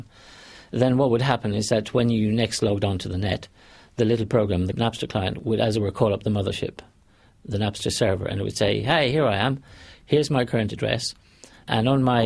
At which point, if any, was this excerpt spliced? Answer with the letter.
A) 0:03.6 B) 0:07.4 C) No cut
C